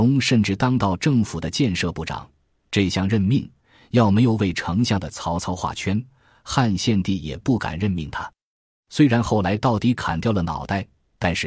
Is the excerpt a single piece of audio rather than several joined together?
yes; 0 cuts

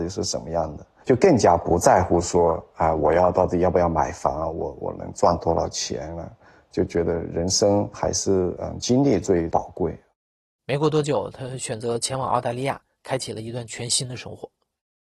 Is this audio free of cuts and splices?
no; 1 cut; at 10.6 s

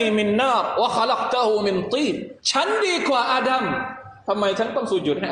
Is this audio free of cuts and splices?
no; 1 cut; at 2.4 s

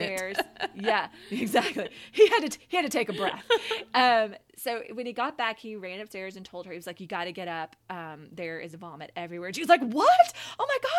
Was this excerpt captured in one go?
yes; 0 cuts

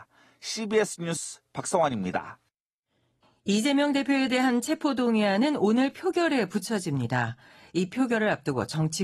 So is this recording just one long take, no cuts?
yes; 0 cuts

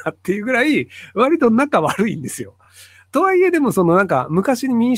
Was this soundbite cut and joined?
no; 0 cuts

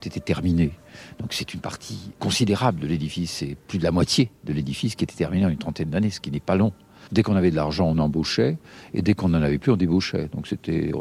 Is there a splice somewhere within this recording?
yes; 2 cuts; at 2.1 s, 7.1 s

